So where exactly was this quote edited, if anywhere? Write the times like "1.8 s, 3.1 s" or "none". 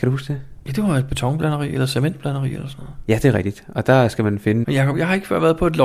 4.6 s